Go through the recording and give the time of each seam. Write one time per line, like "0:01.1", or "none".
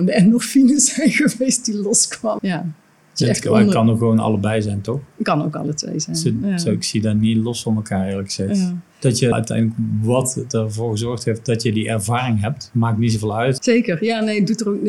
0:02.4
0:09.3
0:13.6